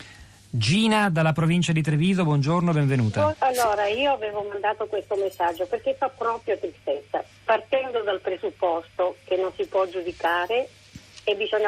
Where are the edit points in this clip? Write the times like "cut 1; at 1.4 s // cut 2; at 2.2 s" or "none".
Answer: cut 1; at 3.3 s